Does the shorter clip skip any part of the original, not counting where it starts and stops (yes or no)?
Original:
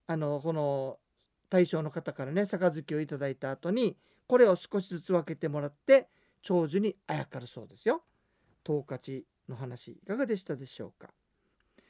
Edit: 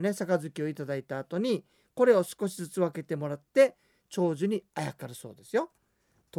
no